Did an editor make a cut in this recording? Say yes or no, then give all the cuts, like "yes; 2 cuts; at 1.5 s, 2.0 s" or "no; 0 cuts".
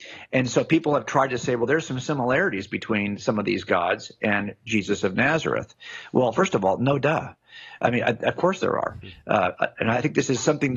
no; 0 cuts